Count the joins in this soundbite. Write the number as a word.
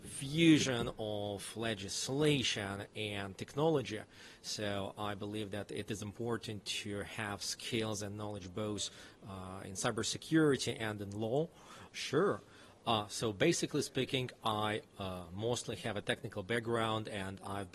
one